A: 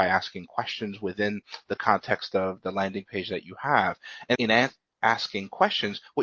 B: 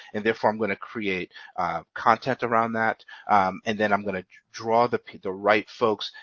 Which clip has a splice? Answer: A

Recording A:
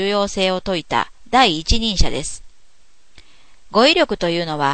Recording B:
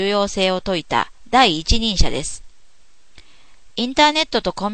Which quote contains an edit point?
A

